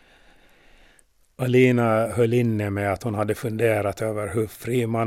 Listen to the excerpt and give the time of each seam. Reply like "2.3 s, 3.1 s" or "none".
none